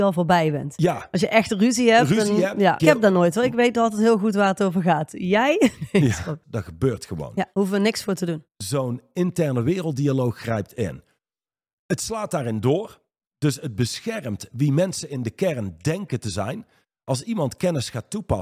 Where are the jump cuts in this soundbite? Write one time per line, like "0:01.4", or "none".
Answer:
0:02.8
0:06.4